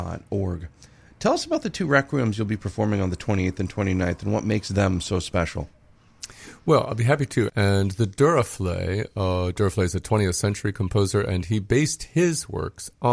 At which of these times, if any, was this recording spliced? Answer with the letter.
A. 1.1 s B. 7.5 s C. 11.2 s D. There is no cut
B